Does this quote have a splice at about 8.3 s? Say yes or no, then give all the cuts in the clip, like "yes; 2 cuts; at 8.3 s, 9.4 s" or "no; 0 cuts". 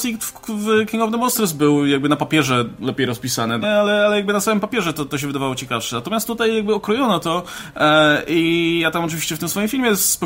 no; 1 cut; at 3.6 s